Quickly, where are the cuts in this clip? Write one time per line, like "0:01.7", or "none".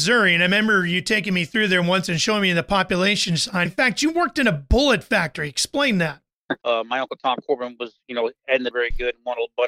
0:03.7
0:06.6
0:08.7